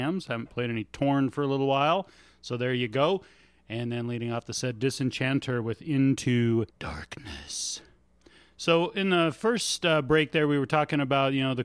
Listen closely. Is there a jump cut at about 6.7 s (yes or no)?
yes